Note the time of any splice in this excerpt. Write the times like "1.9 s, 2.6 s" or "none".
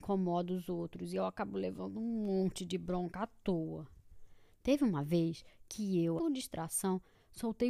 6.2 s